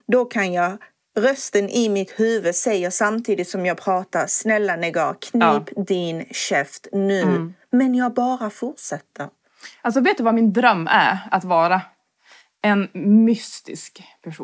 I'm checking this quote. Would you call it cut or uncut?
uncut